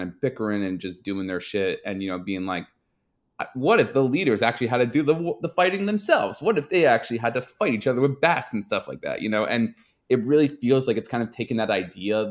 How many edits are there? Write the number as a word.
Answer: zero